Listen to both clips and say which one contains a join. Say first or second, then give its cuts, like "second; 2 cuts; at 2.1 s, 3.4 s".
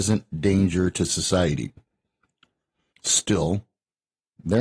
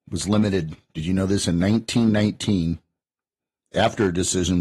first; 1 cut; at 2.9 s